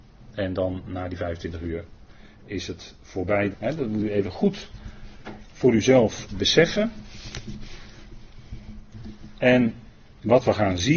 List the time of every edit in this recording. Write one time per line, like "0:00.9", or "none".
0:03.5
0:06.3